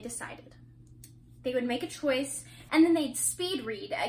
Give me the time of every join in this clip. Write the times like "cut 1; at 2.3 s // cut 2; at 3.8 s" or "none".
cut 1; at 2.7 s